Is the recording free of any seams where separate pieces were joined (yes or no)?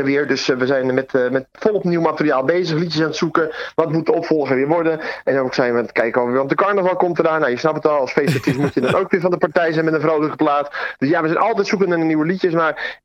yes